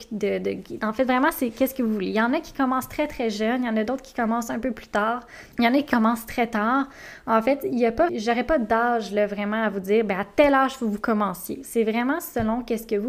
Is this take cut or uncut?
cut